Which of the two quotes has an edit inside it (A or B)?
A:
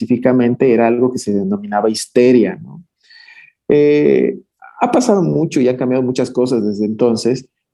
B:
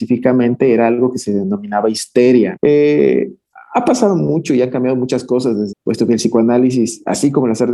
B